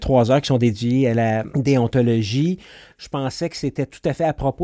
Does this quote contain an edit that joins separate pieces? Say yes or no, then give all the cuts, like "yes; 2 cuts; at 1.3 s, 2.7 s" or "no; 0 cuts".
yes; 1 cut; at 2.9 s